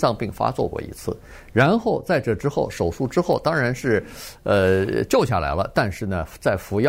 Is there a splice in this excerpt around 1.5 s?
no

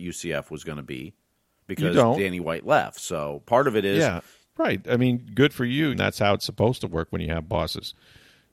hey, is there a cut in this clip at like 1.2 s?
no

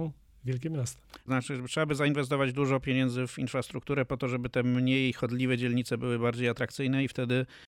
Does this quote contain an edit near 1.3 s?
yes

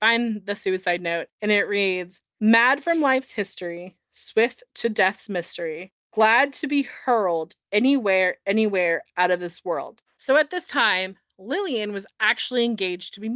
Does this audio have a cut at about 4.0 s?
no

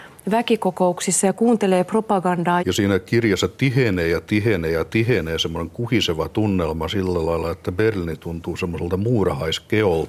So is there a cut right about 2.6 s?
yes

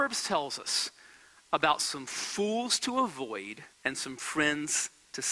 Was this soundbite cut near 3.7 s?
yes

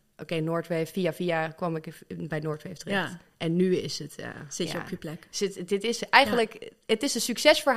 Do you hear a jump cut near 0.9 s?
no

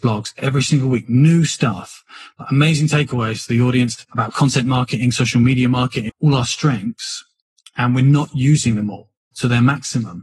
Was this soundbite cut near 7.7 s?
no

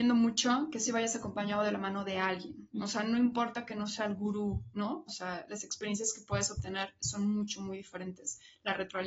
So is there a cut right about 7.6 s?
no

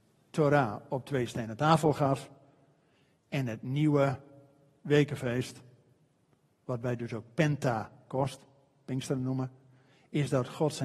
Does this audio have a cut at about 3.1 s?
no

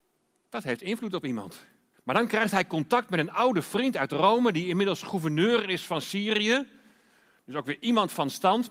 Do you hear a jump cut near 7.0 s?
no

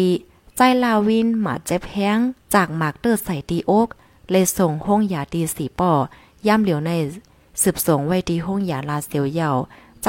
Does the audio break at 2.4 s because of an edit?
yes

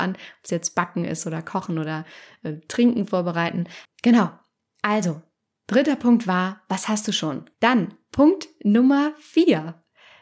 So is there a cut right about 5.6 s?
no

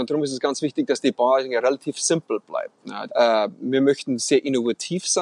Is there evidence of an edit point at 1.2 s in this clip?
no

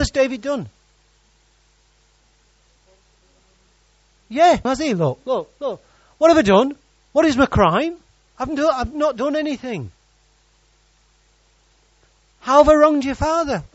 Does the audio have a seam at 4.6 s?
yes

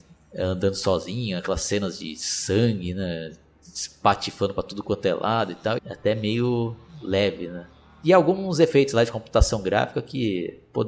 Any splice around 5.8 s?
yes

